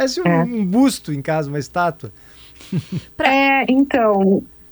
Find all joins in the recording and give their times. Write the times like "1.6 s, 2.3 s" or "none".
none